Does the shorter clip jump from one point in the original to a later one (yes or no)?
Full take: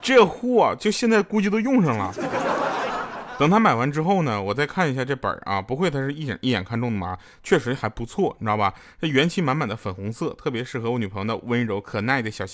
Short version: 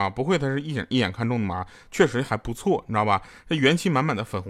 no